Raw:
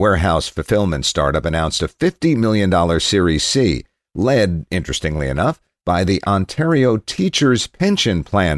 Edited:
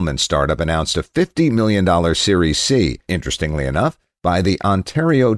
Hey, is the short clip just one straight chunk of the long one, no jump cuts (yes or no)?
no